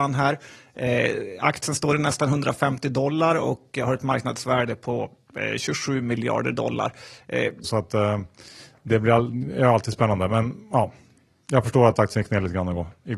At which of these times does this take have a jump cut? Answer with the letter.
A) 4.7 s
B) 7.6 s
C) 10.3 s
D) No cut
B